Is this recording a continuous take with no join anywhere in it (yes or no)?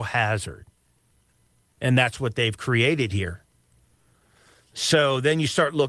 yes